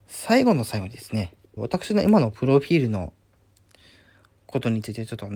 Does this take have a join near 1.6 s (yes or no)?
yes